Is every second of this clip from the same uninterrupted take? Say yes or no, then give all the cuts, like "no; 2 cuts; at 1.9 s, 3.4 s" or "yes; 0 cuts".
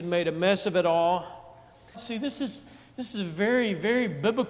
no; 1 cut; at 1.9 s